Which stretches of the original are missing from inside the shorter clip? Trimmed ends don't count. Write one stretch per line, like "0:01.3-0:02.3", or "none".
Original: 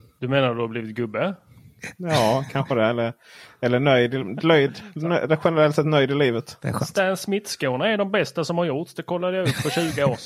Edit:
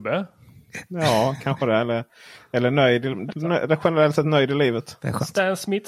0:04.4-0:04.9